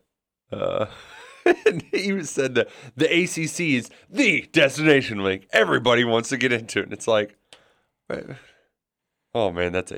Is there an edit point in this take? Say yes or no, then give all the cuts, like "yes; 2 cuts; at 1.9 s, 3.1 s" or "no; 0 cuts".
no; 0 cuts